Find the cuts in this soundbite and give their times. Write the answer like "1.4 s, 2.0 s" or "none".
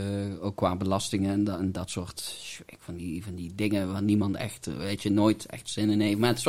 none